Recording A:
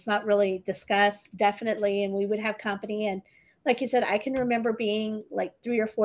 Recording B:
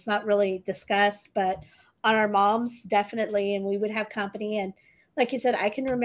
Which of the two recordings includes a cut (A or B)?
A